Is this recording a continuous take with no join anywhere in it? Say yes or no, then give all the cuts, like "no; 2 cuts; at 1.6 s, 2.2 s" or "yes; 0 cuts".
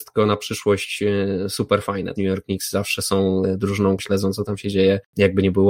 no; 2 cuts; at 2.2 s, 4.0 s